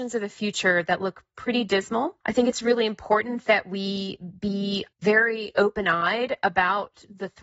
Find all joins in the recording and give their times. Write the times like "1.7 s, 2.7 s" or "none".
2.2 s, 4.9 s

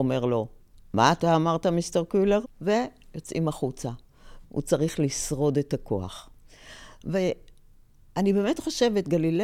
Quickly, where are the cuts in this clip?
2.4 s, 4.4 s

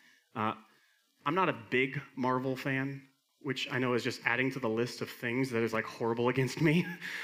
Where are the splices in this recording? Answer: 3.3 s

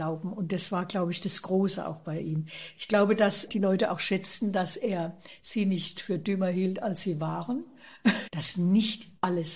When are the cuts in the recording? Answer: 3.5 s, 8.3 s

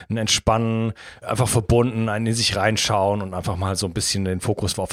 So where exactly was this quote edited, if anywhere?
1.2 s

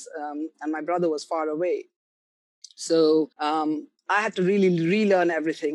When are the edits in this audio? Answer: 3.3 s

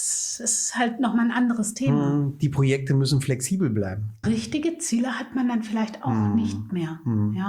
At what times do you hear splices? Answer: 4.2 s

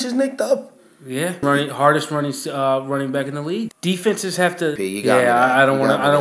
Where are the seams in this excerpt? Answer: 1.4 s, 3.7 s, 4.8 s

